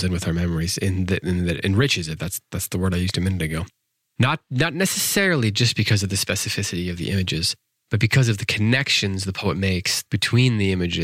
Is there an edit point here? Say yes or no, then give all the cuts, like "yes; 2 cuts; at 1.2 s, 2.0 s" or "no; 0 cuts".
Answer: yes; 1 cut; at 10.1 s